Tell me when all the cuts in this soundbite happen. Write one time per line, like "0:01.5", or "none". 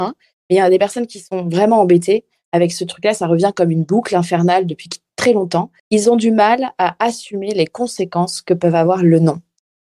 0:05.8